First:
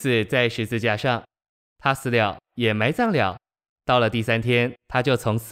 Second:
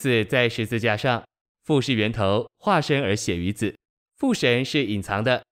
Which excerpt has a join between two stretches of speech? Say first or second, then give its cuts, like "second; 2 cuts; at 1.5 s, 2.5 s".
second; 1 cut; at 1.4 s